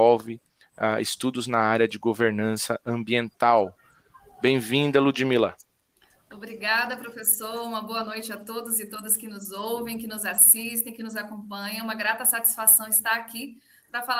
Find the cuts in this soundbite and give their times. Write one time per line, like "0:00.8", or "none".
none